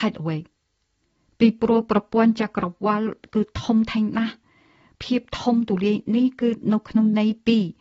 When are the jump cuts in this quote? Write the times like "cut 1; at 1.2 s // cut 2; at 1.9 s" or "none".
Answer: none